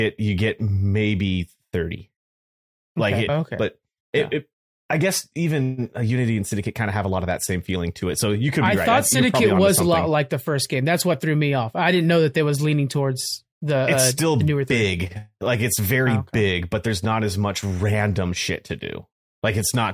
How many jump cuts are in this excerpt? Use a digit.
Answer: 1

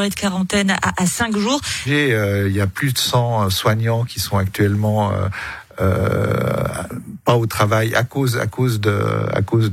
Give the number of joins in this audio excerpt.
1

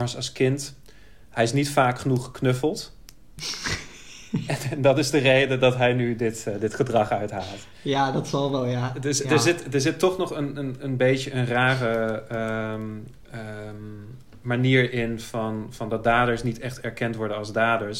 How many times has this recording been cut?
0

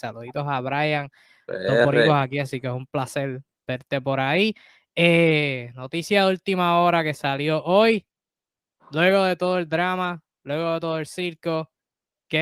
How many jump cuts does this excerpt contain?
0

